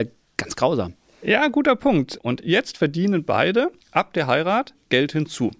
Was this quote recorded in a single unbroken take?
no; 2 cuts; at 2.2 s, 3.8 s

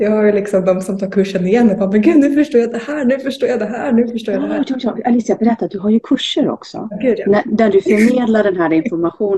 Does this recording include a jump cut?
no; 0 cuts

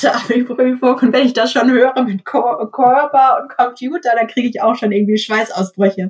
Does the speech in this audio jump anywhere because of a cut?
no; 0 cuts

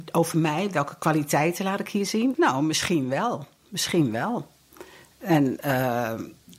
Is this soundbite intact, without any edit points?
no; 1 cut; at 2.3 s

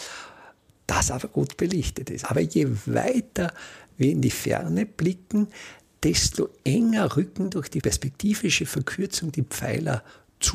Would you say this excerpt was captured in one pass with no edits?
no; 1 cut; at 2.2 s

